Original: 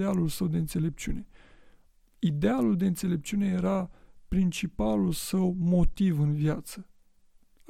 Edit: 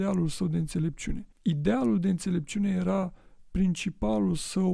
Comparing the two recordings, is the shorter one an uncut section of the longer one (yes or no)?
no